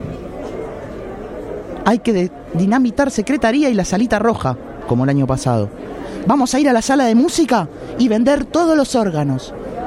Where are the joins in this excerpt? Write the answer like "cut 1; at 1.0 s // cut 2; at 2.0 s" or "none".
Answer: cut 1; at 4.8 s // cut 2; at 6.2 s